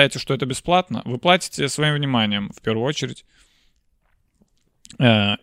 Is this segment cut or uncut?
uncut